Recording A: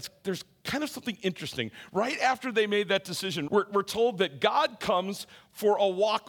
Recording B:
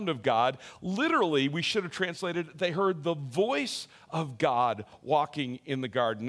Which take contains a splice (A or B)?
A